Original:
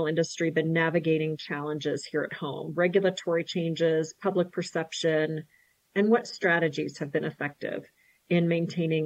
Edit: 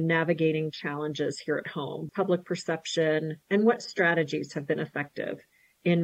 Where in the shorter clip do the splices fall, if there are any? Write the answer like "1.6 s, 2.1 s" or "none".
2.1 s, 3.4 s